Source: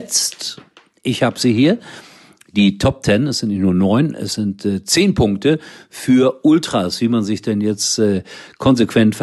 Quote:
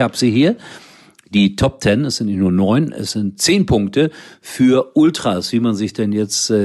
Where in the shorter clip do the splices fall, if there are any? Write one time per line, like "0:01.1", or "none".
0:03.3